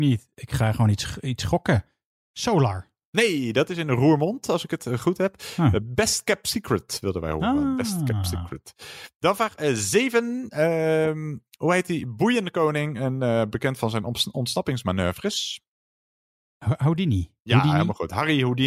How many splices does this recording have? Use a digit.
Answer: 0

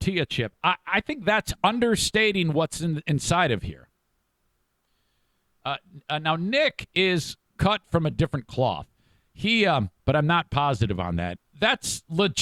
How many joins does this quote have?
2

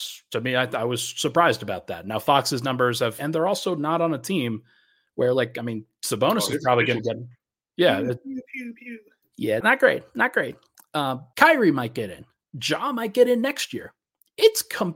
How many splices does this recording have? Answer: 3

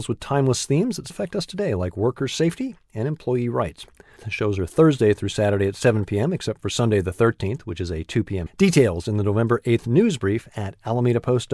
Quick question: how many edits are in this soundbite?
3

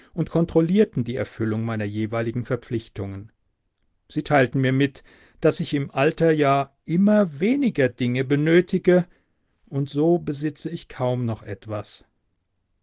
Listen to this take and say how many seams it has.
0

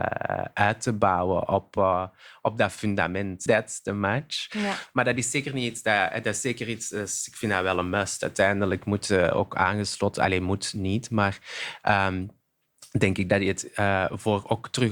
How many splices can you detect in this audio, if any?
1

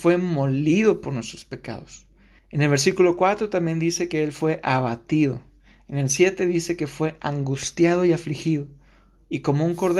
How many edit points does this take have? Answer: 1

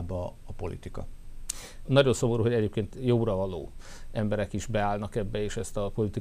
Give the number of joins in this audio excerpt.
1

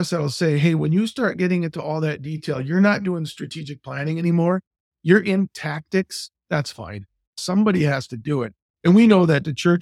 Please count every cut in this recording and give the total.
0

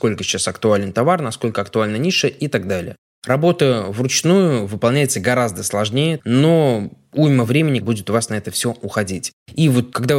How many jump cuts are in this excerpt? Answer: 2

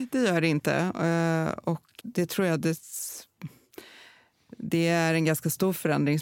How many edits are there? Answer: 1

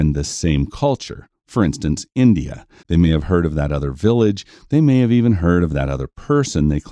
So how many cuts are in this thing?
1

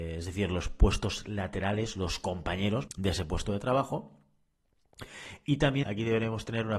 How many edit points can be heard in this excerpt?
2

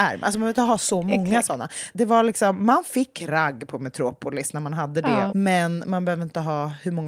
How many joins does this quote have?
2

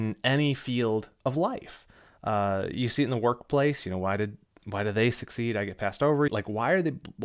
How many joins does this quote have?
1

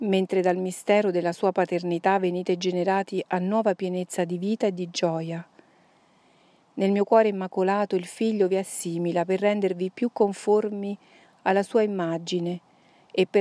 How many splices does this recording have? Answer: 0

